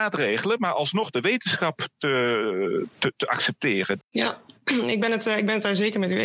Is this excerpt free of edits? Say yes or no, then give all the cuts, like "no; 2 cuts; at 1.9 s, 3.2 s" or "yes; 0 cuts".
no; 1 cut; at 4.0 s